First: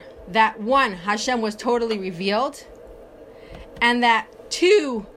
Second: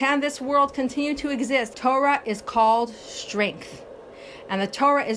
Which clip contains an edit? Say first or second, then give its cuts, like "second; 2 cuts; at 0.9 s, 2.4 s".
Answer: second; 1 cut; at 1.7 s